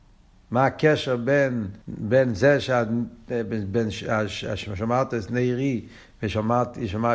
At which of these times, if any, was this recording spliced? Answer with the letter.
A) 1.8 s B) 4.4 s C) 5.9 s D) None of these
A